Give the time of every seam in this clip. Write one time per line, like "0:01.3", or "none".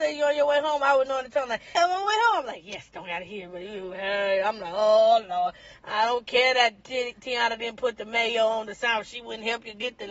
0:01.8